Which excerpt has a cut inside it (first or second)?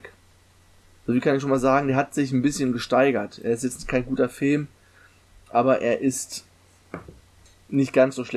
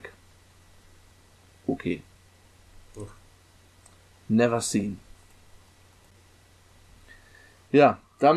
first